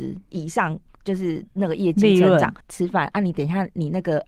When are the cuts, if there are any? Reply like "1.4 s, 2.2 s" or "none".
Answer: 2.6 s